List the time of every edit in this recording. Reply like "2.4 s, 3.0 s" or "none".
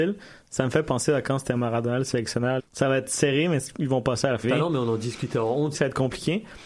2.6 s, 4.4 s, 5.7 s